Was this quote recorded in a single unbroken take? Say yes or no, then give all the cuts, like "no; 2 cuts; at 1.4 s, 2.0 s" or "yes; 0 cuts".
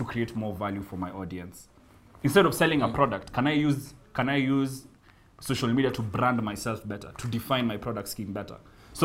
yes; 0 cuts